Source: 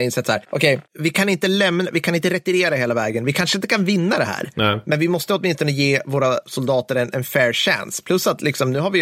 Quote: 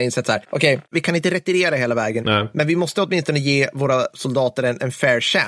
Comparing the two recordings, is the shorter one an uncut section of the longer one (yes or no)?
no